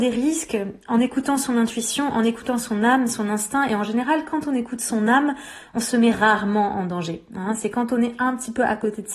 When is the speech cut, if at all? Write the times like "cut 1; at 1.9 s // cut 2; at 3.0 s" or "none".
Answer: none